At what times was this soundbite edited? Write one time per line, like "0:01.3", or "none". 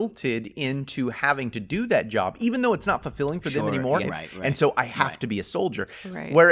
0:04.0